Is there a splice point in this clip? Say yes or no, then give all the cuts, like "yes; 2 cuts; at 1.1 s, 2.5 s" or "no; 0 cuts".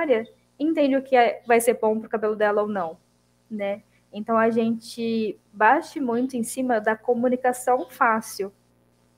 no; 0 cuts